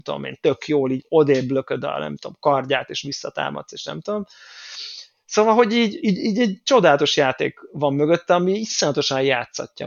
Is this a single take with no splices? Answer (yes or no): yes